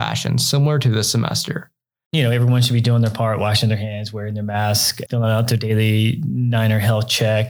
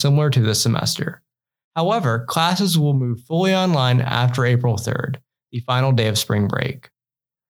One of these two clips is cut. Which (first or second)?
first